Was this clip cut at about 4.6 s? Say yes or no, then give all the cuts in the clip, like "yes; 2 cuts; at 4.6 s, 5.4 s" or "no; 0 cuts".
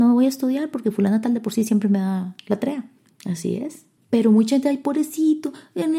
no; 1 cut; at 3.0 s